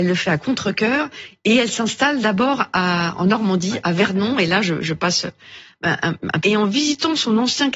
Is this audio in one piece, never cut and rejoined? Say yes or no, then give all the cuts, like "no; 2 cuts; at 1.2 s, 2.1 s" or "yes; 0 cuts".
no; 1 cut; at 6.4 s